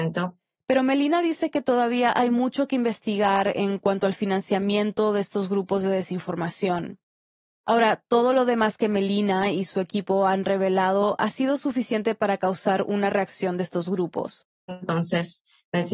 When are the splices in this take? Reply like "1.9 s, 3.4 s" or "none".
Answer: 14.7 s